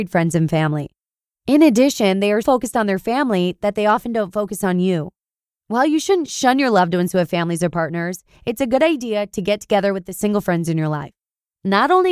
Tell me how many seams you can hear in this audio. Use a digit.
1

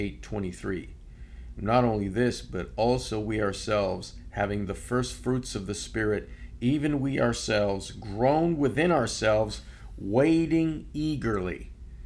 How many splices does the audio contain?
0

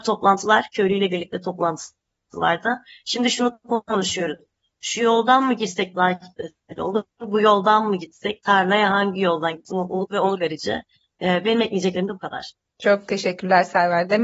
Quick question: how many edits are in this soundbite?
0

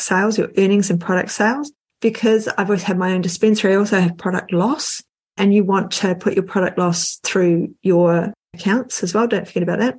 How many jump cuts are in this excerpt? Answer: 0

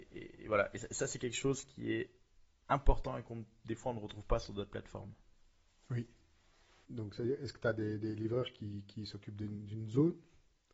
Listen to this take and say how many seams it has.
1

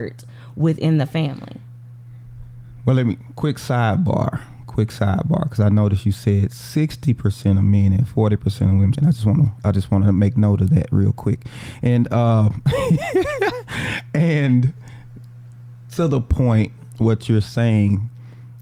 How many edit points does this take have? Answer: 1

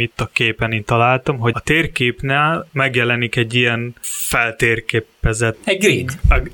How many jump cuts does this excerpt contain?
1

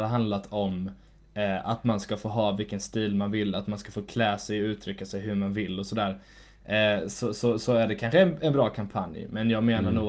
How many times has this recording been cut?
0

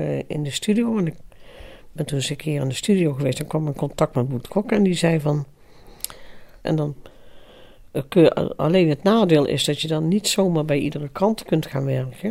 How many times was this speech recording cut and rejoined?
1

